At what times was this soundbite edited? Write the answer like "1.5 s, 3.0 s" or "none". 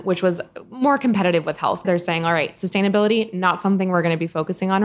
1.8 s